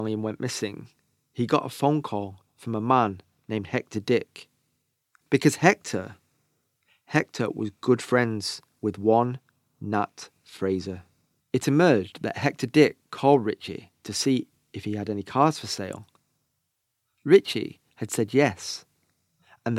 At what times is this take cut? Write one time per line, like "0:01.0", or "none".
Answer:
0:05.2